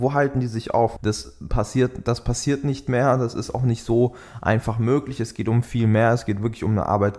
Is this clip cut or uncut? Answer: cut